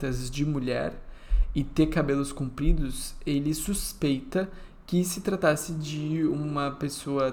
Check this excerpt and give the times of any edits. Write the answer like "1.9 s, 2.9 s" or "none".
none